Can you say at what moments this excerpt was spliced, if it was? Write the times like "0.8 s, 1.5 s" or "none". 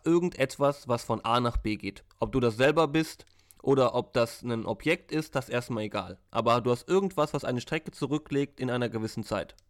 none